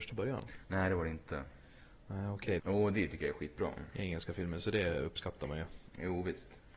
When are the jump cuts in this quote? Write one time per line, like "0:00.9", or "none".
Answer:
0:02.6